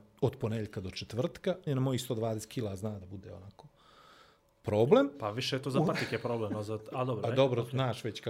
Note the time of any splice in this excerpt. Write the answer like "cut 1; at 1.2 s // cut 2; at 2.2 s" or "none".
cut 1; at 1.7 s